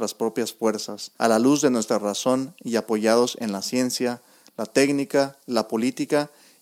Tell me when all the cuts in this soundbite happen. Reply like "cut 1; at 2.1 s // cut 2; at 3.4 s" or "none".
cut 1; at 1.2 s